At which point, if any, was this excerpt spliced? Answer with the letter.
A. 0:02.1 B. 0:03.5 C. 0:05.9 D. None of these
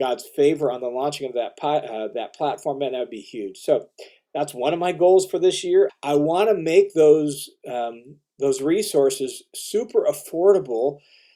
C